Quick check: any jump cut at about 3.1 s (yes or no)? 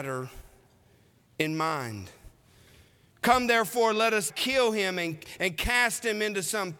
yes